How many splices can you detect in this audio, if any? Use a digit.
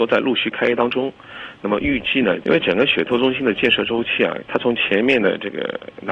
2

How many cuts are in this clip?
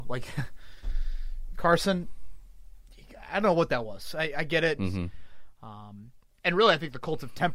1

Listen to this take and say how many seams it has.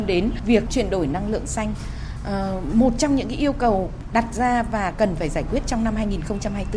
0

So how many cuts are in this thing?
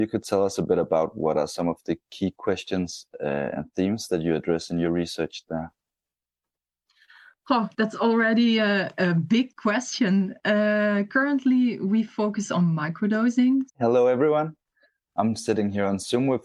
1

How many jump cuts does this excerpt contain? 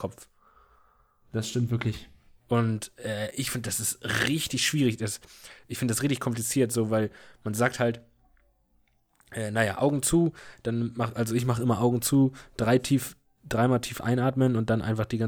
0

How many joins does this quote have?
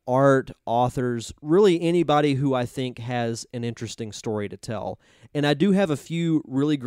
0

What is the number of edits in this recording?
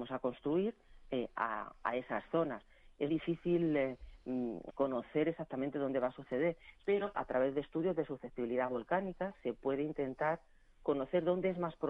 2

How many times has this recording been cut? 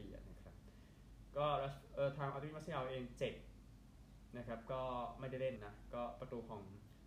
1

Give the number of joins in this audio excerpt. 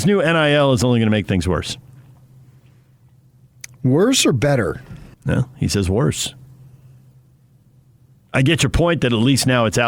1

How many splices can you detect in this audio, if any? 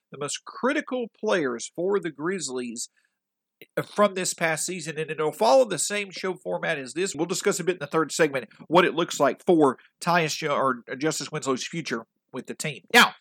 1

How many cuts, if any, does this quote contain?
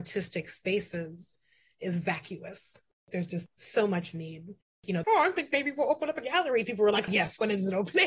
2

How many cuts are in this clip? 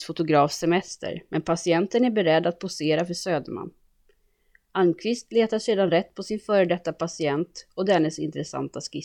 0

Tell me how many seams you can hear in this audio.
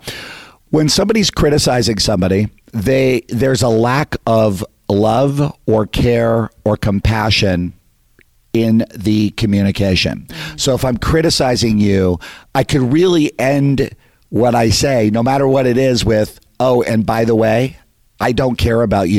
0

